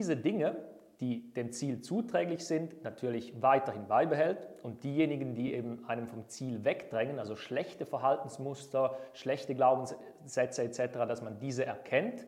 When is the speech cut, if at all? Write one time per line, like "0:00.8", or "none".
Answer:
none